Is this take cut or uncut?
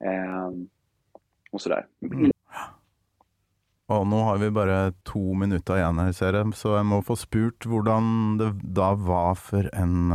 cut